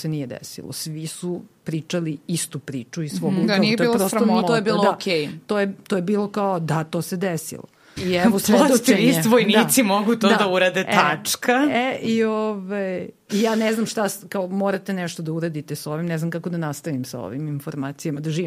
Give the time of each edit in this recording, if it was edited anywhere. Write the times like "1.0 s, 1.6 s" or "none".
4.4 s, 8.0 s